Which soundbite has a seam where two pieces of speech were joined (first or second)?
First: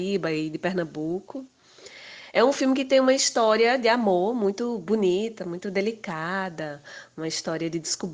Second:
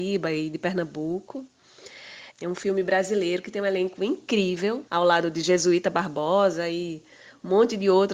second